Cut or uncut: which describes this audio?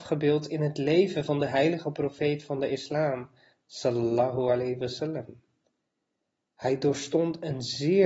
cut